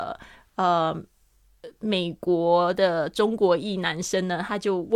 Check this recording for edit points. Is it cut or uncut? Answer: uncut